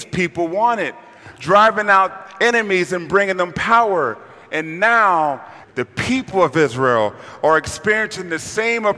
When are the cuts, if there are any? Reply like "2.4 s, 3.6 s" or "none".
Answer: 5.6 s